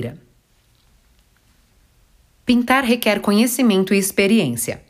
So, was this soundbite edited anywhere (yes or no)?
no